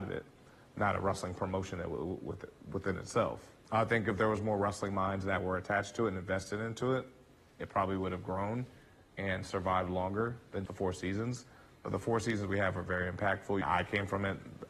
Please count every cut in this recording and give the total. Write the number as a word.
three